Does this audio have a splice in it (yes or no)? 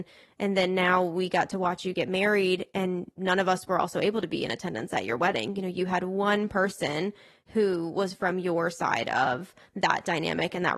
no